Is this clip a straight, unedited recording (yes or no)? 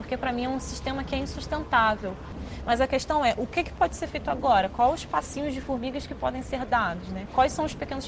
yes